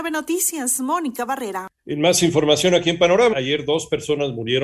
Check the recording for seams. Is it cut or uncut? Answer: cut